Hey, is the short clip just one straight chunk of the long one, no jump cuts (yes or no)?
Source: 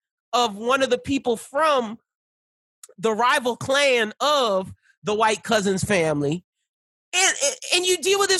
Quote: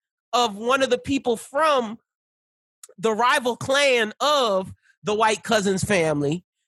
yes